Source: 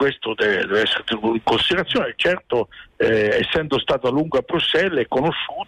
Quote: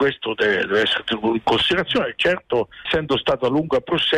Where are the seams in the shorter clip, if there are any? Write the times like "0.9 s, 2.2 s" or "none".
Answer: 2.9 s